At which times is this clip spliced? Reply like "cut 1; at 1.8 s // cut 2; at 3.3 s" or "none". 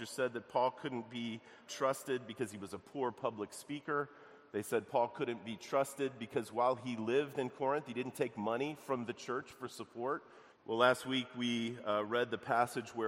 cut 1; at 1.7 s // cut 2; at 10.5 s